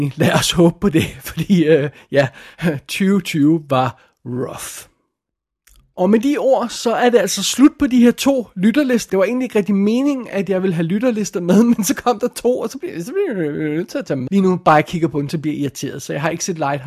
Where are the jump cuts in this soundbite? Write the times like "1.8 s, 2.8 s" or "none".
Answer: 9.1 s, 14.3 s

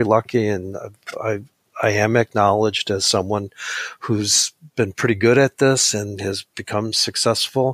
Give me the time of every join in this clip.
none

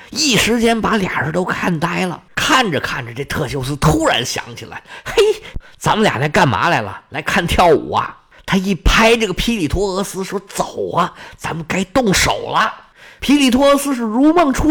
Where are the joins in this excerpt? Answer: none

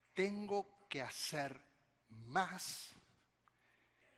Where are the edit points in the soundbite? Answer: none

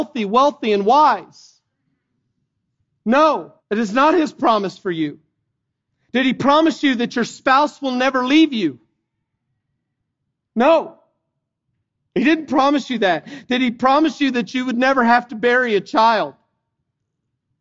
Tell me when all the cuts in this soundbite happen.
3.6 s

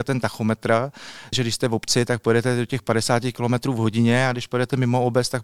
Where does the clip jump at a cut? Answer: 1.3 s

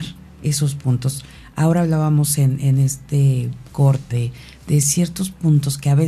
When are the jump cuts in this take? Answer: 4.1 s

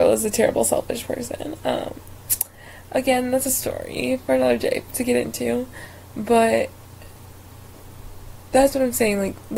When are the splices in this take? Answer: none

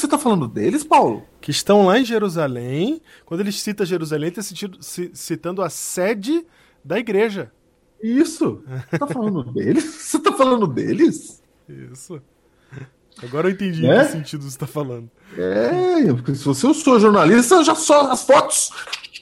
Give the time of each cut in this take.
none

